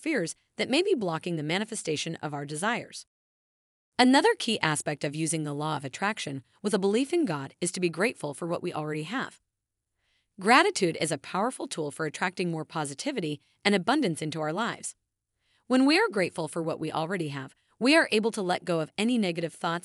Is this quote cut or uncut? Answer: uncut